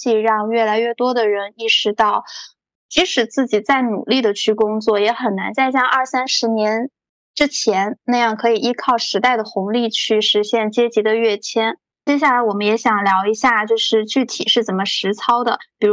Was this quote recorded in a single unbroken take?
no; 1 cut; at 12.0 s

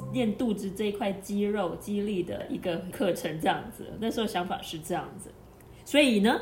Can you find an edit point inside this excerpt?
no; 0 cuts

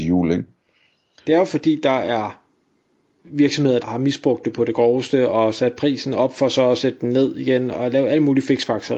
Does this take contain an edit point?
yes; 3 cuts; at 1.2 s, 3.8 s, 7.7 s

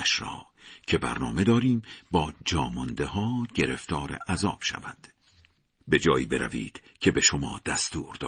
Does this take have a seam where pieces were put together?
yes; 1 cut; at 5.8 s

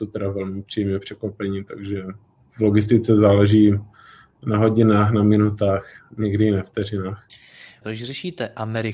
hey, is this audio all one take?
no; 1 cut; at 7.8 s

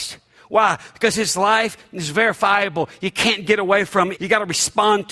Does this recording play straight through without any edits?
no; 1 cut; at 4.2 s

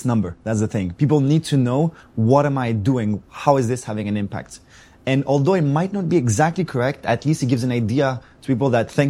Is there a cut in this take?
no; 0 cuts

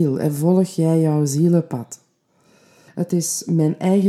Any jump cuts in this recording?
yes; 1 cut; at 2.9 s

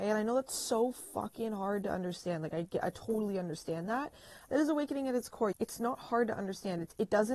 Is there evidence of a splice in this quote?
yes; 2 cuts; at 4.4 s, 5.5 s

